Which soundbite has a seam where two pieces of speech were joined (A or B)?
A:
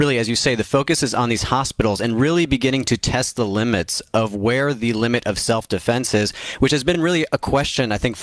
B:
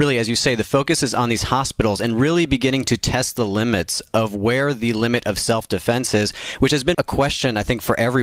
B